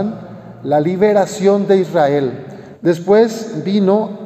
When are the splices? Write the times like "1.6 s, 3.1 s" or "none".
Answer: 2.7 s